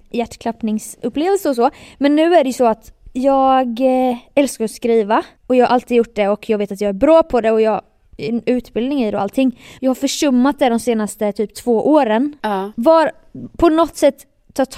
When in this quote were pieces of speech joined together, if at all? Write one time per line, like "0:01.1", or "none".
0:12.7